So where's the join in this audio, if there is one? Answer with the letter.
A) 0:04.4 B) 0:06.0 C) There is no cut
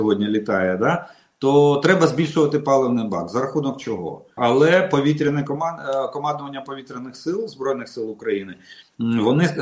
A